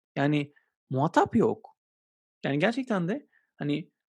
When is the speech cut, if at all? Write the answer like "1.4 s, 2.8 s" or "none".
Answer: 2.3 s